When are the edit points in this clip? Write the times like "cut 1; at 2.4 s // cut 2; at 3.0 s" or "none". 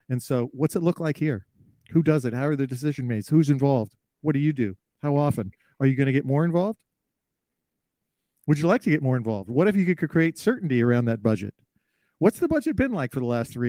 none